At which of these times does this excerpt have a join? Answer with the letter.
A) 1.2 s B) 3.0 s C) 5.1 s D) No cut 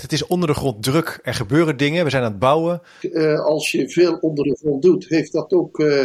B